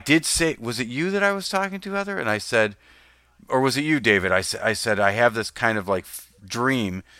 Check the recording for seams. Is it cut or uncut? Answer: uncut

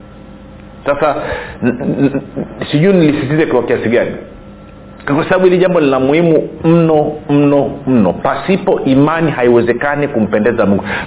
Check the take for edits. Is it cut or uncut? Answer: cut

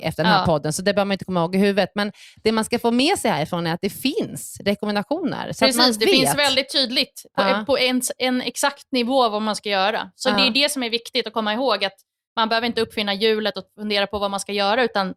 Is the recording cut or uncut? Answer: uncut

